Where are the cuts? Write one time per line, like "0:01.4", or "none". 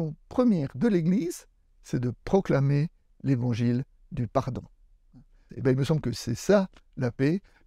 0:05.5